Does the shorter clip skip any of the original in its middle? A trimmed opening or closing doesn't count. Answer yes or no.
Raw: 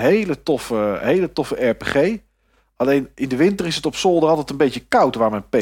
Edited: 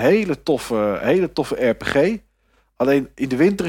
no